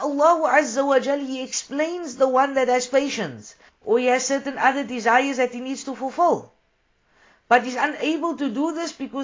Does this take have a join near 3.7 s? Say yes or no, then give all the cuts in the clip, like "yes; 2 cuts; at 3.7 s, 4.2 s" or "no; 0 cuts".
yes; 1 cut; at 3.7 s